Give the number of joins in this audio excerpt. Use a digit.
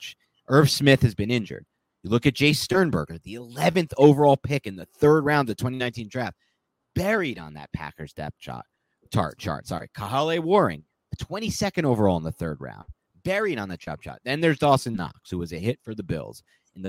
0